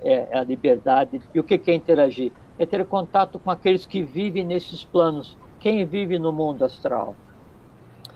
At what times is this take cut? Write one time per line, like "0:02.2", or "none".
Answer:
0:01.2